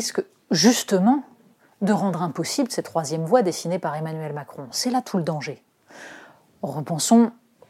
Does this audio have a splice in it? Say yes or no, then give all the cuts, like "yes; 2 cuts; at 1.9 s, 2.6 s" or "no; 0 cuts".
no; 0 cuts